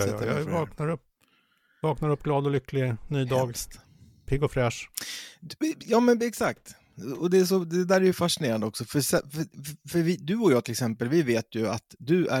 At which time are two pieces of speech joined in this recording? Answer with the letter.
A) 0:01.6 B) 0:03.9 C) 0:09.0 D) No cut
D